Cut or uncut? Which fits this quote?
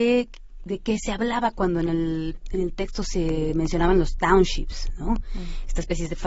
uncut